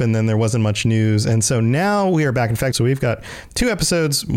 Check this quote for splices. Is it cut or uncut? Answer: cut